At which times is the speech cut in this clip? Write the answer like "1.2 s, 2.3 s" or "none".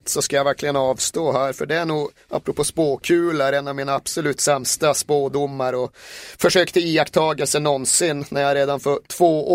none